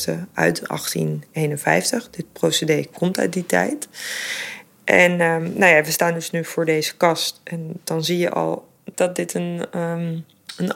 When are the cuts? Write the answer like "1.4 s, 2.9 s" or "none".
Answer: 8.9 s